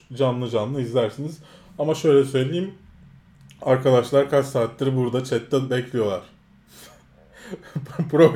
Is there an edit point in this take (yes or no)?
no